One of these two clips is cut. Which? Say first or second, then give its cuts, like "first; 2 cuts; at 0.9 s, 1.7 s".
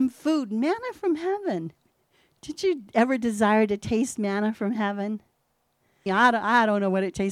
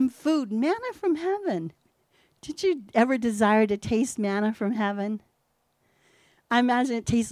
first; 1 cut; at 6.1 s